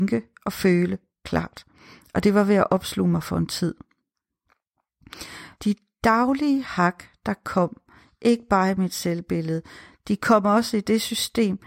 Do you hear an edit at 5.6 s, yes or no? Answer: yes